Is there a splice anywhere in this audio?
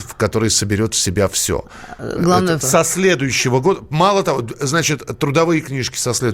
yes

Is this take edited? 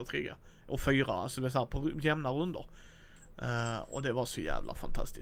no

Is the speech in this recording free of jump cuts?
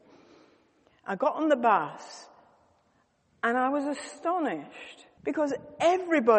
no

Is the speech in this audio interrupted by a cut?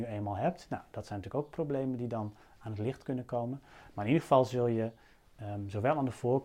no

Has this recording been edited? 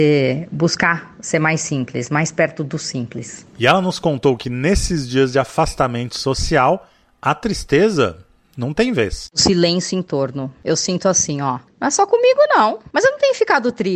no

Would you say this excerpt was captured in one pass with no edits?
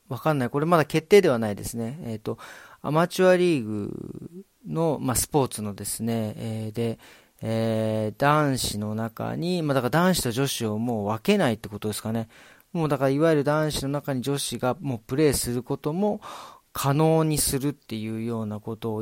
yes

